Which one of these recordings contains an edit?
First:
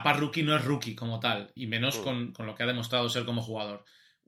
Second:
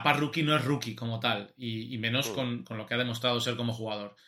first; 1 cut; at 1.6 s

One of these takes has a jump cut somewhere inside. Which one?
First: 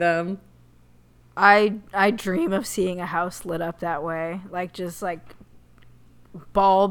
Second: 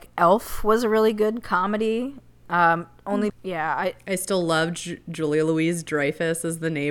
second; 1 cut; at 3.3 s

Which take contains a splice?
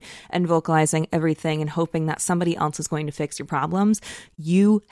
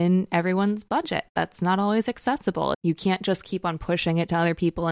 second; 1 cut; at 2.7 s

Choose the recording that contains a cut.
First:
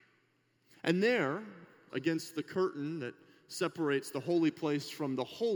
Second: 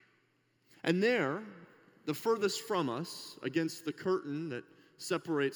first; 1 cut; at 1.9 s

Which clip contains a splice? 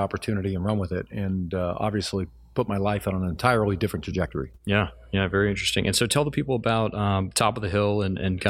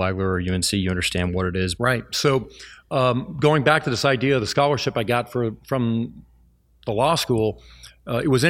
second; 1 cut; at 1.8 s

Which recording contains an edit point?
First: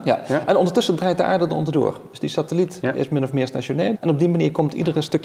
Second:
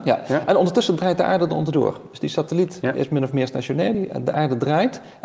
first; 1 cut; at 3.9 s

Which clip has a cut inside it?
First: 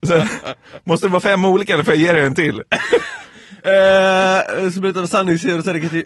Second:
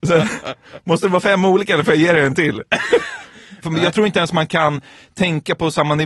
second; 1 cut; at 3.6 s

